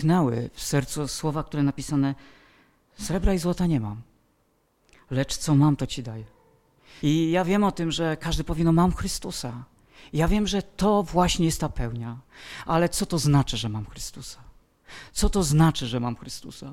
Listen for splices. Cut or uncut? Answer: cut